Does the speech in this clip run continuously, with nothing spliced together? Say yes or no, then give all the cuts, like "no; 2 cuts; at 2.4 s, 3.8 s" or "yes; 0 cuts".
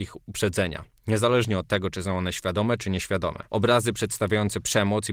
no; 1 cut; at 3.5 s